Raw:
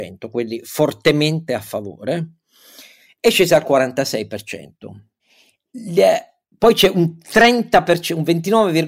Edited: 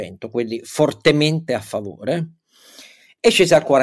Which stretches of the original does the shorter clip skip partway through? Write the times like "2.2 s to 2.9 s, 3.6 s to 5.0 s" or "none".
none